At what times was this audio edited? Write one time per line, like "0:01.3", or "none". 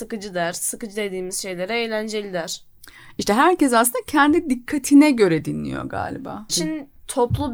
0:06.5